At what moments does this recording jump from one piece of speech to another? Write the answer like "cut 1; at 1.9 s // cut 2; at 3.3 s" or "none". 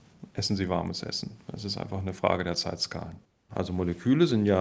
cut 1; at 3.5 s